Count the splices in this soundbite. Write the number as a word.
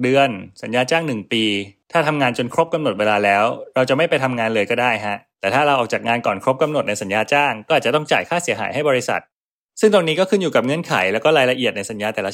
zero